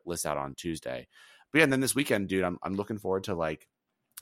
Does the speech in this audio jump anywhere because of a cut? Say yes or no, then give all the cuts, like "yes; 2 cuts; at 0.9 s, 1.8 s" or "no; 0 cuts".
no; 0 cuts